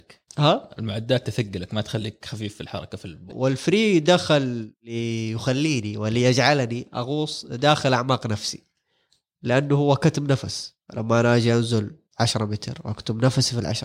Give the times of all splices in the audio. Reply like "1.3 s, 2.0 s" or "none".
3.3 s